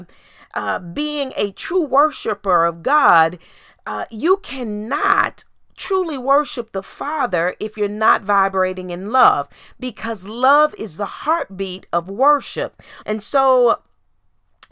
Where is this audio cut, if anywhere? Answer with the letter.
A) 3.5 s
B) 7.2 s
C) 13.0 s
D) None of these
C